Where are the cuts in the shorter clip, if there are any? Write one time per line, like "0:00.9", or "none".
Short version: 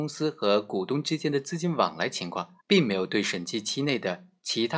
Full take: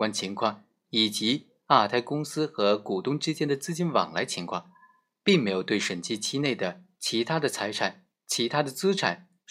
0:02.6